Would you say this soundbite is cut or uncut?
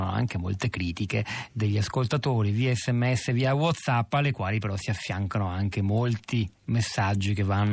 uncut